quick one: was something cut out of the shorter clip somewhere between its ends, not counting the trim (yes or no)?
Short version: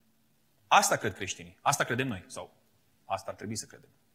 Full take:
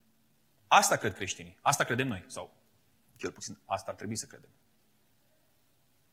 yes